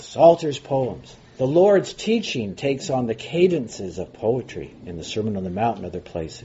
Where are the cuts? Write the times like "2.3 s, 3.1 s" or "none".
1.2 s